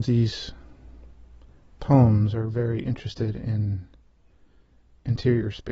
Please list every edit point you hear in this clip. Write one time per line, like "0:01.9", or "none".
none